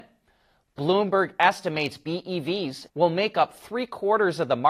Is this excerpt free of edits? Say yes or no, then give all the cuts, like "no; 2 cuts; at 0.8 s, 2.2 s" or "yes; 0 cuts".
no; 1 cut; at 2.9 s